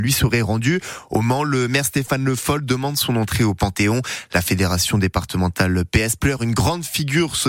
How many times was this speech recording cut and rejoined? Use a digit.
0